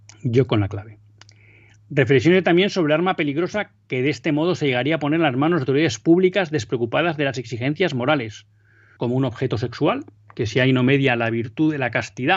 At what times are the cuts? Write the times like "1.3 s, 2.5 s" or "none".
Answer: 9.0 s